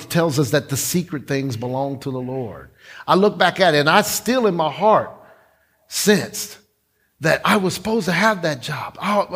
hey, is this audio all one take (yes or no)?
yes